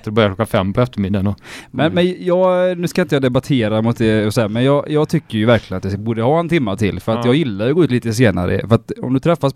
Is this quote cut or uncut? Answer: uncut